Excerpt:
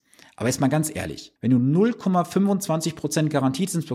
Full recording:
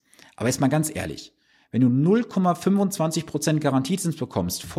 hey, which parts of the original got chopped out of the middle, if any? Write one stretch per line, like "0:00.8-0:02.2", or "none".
0:01.4-0:01.7